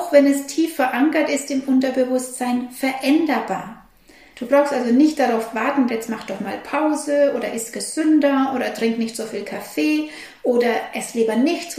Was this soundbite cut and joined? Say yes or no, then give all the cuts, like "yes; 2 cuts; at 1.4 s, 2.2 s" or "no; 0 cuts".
yes; 2 cuts; at 4.3 s, 5.9 s